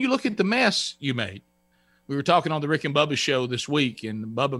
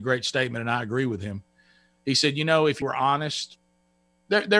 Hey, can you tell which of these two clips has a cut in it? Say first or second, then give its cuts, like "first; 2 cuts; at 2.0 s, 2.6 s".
second; 1 cut; at 2.8 s